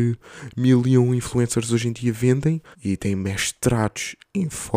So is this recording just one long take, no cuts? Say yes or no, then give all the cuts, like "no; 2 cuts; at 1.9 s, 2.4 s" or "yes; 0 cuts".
no; 1 cut; at 2.7 s